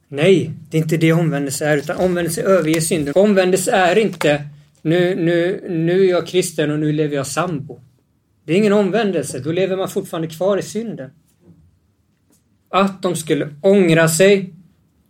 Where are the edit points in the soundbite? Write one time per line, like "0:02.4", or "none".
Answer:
0:03.1
0:12.7

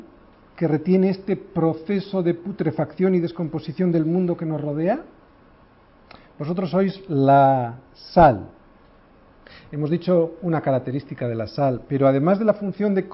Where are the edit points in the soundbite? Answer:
none

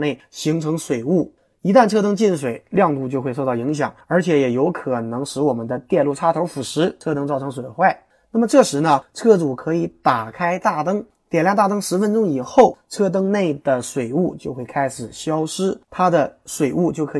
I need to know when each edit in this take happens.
0:15.9

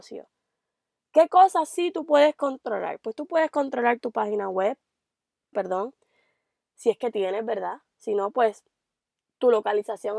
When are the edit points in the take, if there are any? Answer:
0:05.5

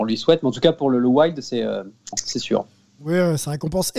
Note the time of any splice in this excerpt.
0:02.1

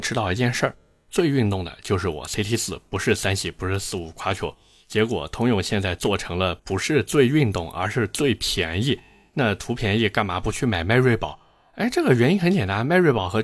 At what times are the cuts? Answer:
none

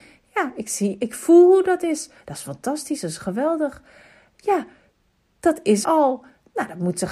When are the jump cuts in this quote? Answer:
0:05.8

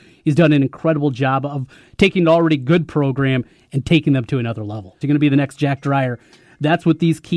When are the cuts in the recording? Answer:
0:05.0

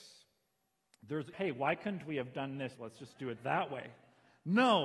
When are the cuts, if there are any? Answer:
0:01.3
0:02.7

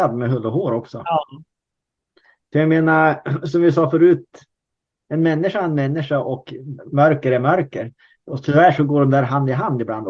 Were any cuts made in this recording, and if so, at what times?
none

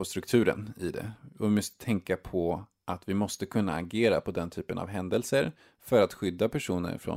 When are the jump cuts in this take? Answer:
none

